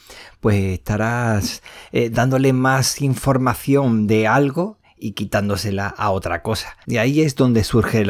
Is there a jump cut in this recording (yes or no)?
yes